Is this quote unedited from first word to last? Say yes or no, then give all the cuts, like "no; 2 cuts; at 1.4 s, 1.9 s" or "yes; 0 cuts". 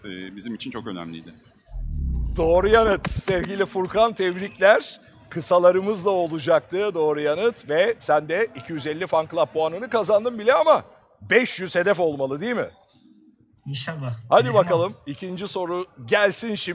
yes; 0 cuts